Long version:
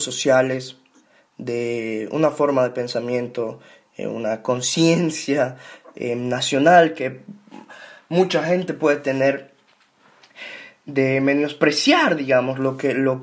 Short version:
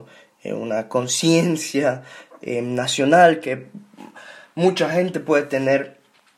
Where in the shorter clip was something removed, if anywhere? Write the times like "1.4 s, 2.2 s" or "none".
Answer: none